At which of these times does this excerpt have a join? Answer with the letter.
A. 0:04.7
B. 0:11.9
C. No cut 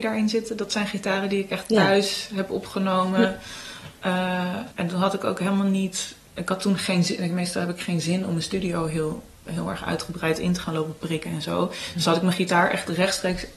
A